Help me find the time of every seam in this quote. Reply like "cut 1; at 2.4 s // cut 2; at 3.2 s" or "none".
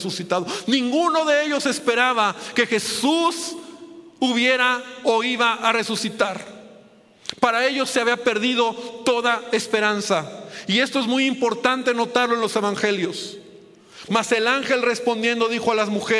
cut 1; at 14.1 s